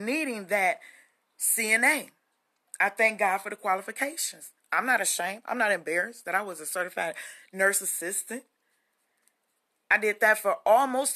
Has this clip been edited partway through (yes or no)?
no